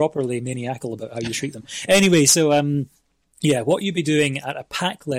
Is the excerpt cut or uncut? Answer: uncut